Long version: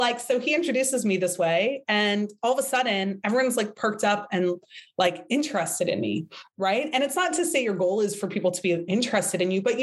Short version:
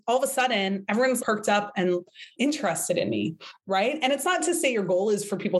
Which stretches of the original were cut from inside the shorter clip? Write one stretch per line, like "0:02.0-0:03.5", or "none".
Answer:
0:03.5-0:03.7
0:04.9-0:05.3